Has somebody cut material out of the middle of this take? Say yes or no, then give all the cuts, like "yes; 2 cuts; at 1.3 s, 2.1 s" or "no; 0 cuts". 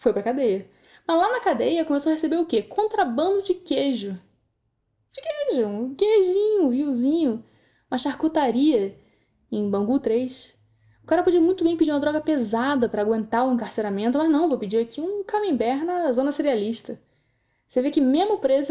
no; 0 cuts